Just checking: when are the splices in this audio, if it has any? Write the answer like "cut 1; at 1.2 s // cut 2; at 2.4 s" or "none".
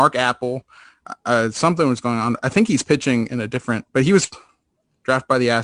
none